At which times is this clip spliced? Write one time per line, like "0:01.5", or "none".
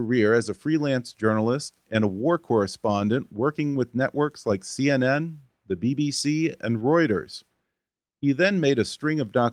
none